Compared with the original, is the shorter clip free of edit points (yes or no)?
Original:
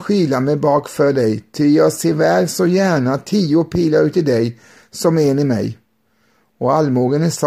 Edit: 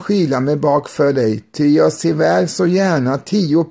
yes